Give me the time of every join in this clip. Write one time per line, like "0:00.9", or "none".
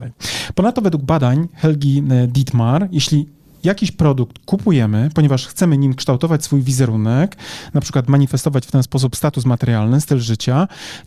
none

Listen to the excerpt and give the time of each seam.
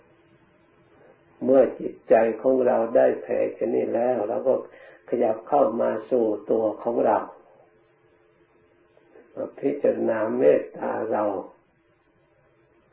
none

